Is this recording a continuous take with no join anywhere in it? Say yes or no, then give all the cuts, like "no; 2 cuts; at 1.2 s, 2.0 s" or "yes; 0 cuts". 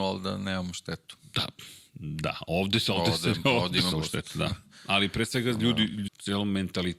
no; 2 cuts; at 3.9 s, 6.1 s